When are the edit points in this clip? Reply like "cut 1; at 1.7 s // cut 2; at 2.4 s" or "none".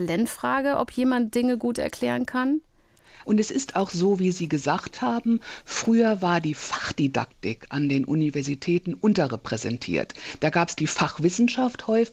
cut 1; at 3.2 s